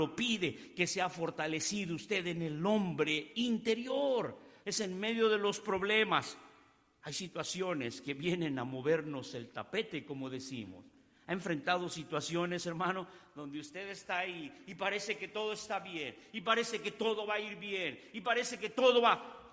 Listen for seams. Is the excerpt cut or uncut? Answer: cut